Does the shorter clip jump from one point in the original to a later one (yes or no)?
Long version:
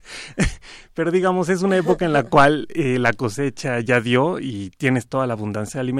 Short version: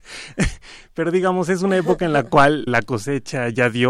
yes